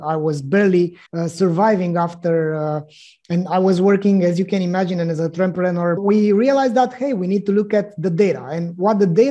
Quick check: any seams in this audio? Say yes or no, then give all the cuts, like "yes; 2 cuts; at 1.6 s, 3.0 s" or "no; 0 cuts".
yes; 2 cuts; at 1.1 s, 6.0 s